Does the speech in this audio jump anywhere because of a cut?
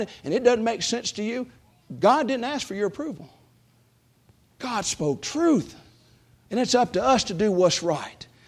no; 0 cuts

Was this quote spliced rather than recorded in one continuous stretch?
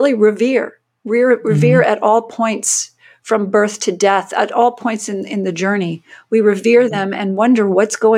no; 0 cuts

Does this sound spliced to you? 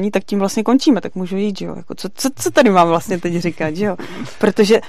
no; 0 cuts

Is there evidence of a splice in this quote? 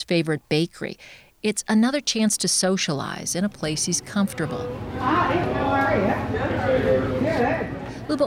no; 0 cuts

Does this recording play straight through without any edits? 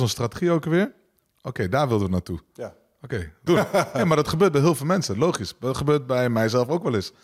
no; 1 cut; at 3.5 s

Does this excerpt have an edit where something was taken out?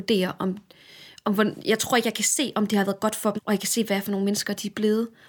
yes; 1 cut; at 3.4 s

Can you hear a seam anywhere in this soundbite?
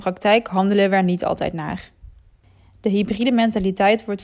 no; 0 cuts

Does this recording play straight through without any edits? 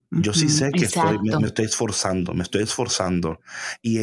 yes; 0 cuts

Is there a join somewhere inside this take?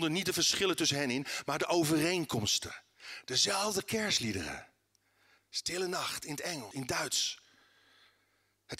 yes; 2 cuts; at 5.4 s, 6.7 s

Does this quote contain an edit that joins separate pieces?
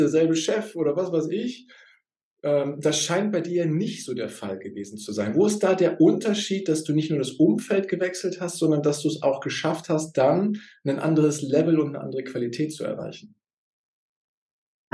no; 0 cuts

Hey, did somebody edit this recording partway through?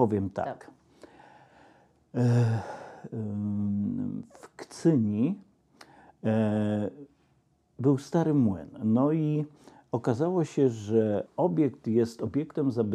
no; 0 cuts

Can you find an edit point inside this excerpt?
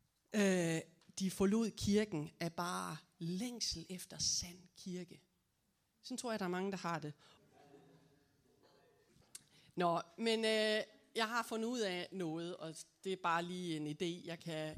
no; 0 cuts

